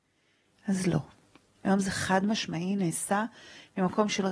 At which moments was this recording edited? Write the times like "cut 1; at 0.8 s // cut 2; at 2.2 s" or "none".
cut 1; at 1.5 s